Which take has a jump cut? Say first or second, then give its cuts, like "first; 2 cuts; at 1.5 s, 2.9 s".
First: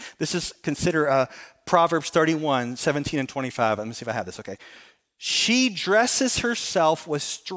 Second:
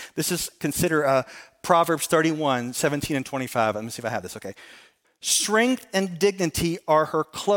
second; 1 cut; at 5.0 s